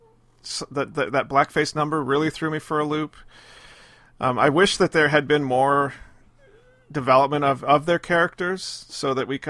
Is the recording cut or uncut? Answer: uncut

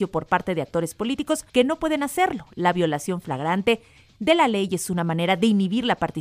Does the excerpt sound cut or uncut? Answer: cut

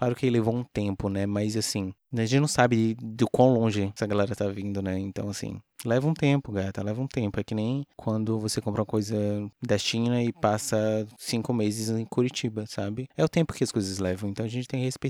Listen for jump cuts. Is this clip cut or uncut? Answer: uncut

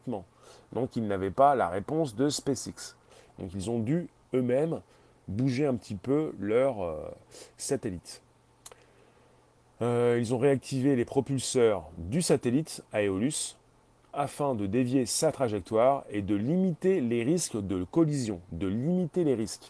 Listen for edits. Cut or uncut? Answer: uncut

